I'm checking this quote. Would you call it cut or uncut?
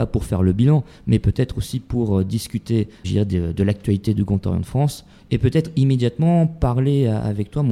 cut